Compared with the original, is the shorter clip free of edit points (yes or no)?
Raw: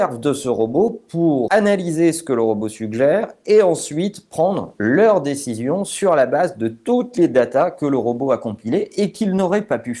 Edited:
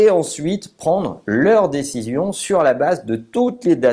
yes